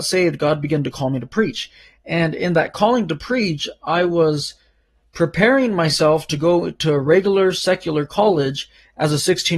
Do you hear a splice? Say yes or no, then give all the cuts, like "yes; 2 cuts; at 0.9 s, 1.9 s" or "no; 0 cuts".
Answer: no; 0 cuts